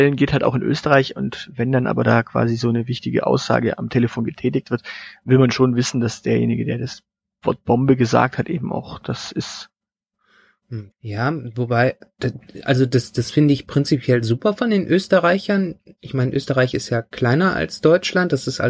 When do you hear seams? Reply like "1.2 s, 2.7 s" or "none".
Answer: 10.9 s